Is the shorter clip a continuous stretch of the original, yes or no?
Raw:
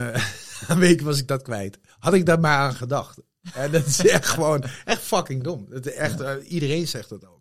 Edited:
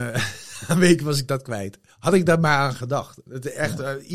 no